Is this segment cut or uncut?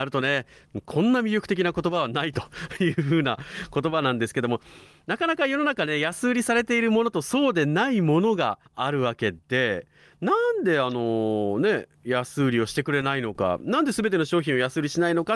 cut